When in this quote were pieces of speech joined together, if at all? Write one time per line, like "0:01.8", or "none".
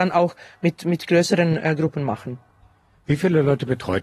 none